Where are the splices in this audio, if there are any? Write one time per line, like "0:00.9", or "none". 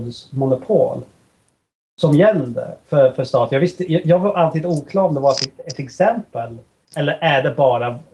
0:06.8